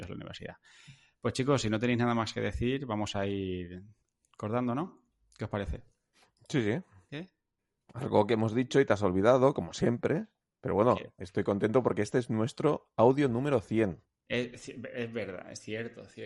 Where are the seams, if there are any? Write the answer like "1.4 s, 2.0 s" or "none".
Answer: 7.1 s